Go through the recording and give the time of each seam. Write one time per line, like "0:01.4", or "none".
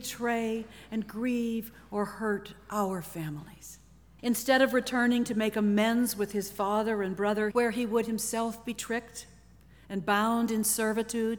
0:04.2
0:07.5